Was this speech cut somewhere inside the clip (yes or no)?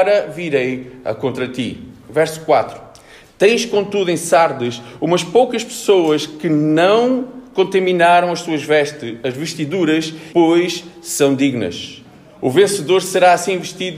yes